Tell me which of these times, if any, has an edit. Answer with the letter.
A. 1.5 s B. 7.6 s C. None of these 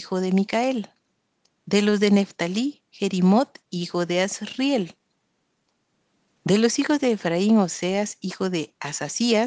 A